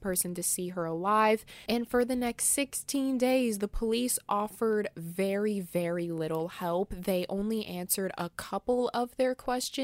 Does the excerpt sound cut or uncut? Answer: uncut